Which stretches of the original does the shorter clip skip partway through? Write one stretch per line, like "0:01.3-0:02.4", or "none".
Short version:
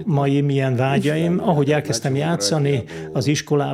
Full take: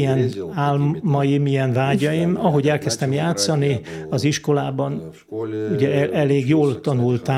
none